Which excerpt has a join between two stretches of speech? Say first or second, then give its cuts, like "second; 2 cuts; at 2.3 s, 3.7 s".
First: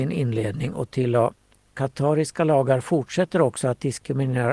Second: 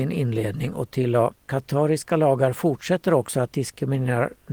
second; 1 cut; at 1.4 s